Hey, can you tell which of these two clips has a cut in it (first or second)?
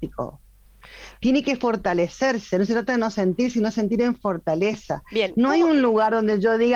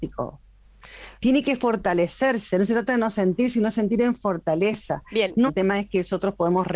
second